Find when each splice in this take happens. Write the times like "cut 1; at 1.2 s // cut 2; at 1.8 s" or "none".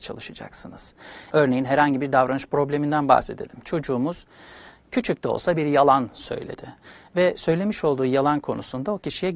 cut 1; at 1.3 s